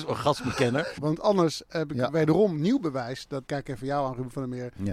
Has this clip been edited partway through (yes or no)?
yes